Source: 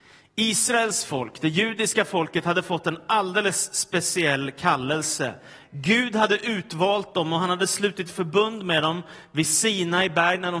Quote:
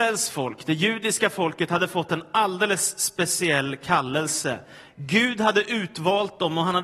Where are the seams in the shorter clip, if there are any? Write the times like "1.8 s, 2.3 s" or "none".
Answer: none